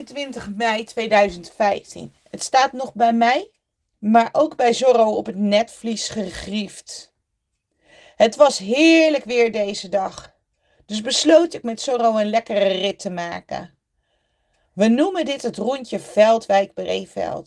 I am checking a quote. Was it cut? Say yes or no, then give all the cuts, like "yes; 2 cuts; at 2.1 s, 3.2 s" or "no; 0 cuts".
no; 0 cuts